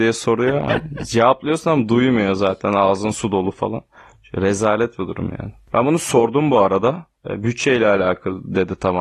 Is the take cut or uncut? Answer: uncut